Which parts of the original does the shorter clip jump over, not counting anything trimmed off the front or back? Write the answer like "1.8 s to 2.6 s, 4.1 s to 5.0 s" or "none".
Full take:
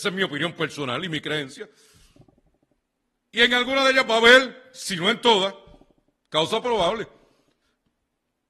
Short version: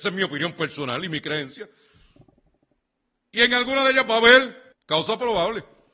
4.7 s to 6.2 s

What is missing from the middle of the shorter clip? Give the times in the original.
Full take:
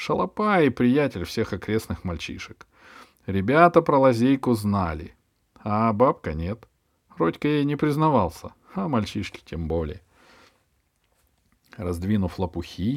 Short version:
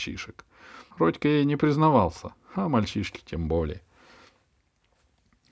3.1 s to 7.1 s

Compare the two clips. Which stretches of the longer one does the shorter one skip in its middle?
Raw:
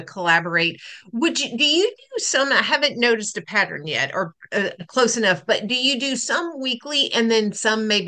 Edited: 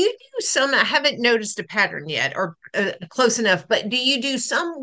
none

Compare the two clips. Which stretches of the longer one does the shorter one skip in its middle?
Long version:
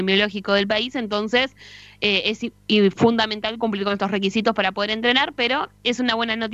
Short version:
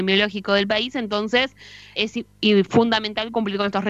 2.0 s to 2.2 s

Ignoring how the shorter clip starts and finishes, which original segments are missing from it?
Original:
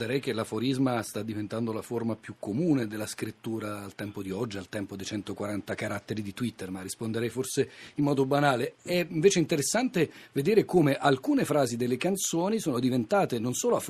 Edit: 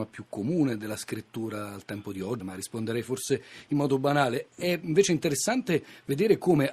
4.5 s to 6.7 s

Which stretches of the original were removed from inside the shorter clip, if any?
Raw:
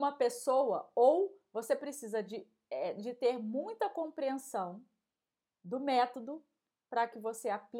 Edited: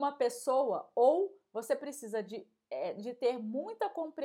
none

